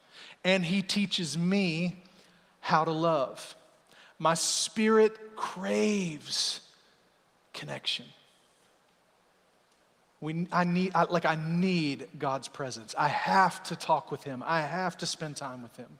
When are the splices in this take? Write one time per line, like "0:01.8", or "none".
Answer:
none